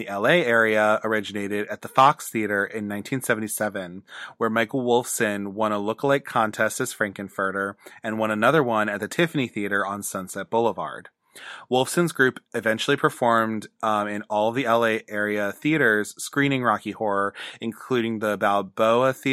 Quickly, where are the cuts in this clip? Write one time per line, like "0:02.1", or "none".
none